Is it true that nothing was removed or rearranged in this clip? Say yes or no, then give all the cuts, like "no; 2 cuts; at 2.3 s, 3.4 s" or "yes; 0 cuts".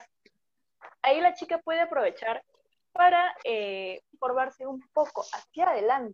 no; 1 cut; at 4.1 s